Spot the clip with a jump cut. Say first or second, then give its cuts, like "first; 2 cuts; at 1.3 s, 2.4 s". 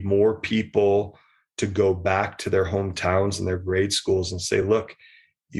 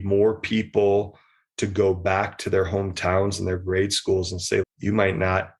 second; 1 cut; at 4.6 s